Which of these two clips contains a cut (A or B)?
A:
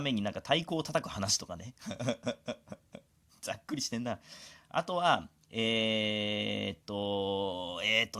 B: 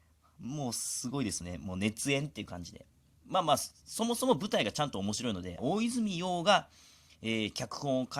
B